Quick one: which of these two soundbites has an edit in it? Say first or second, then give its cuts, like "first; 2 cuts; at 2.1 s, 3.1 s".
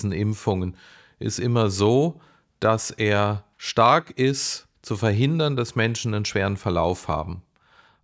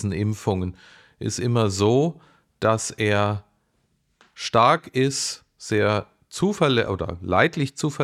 first; 2 cuts; at 3.5 s, 4.7 s